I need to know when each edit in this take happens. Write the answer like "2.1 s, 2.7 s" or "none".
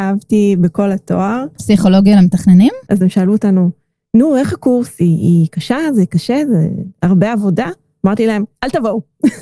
1.6 s, 2.9 s